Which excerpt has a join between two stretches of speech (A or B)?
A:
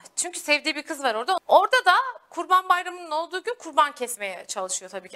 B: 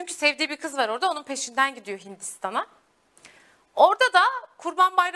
A